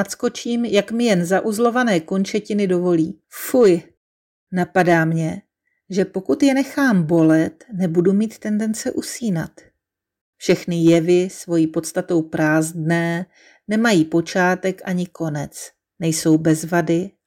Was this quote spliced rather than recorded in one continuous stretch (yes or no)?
yes